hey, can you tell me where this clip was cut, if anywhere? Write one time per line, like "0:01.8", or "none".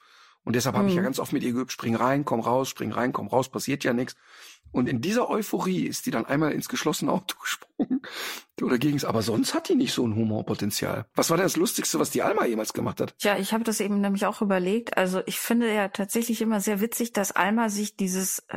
0:11.1